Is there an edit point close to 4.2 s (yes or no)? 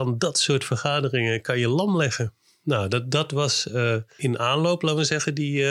yes